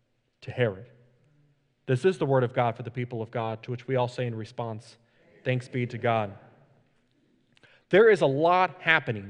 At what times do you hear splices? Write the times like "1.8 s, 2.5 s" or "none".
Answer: none